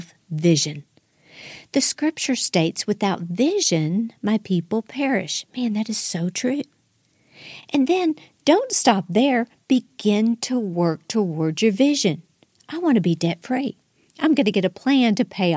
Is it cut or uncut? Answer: uncut